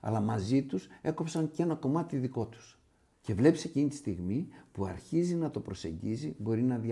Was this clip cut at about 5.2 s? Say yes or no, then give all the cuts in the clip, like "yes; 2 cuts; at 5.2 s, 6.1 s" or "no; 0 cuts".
no; 1 cut; at 3.1 s